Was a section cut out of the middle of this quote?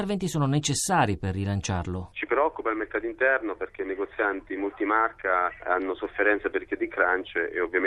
no; 0 cuts

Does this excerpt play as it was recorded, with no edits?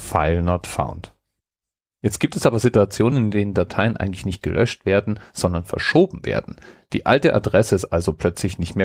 yes; 0 cuts

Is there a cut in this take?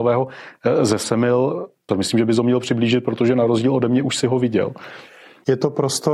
yes; 1 cut; at 1.9 s

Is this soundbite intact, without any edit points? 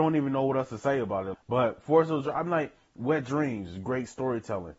no; 1 cut; at 1.3 s

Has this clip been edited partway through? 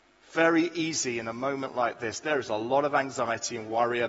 no; 0 cuts

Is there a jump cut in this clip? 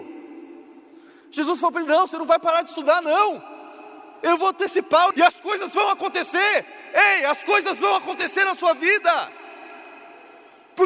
yes; 1 cut; at 5.1 s

